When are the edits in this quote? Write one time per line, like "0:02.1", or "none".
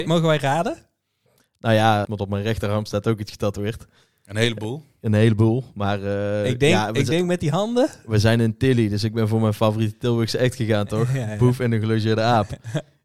0:02.0